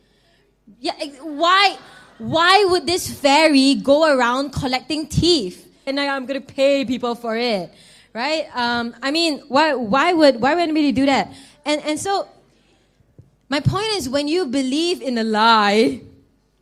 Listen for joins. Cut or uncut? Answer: cut